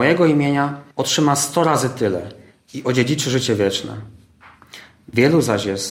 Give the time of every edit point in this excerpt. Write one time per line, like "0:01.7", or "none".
0:00.9